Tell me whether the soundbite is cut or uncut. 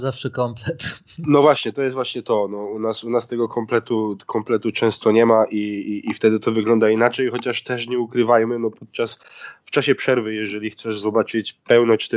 uncut